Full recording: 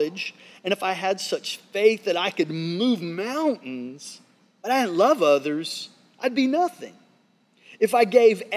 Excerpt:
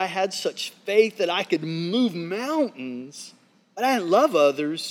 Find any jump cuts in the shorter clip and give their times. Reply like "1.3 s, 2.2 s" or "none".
none